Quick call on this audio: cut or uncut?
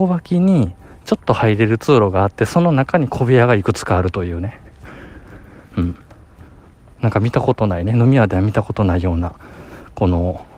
uncut